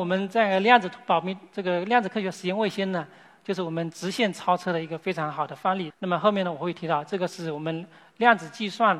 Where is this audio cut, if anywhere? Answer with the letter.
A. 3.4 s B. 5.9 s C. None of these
B